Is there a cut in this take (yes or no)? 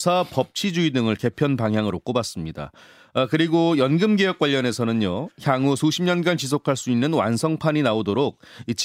no